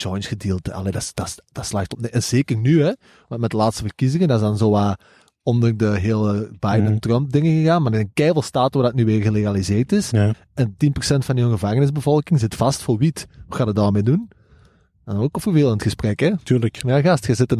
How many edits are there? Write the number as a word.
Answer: zero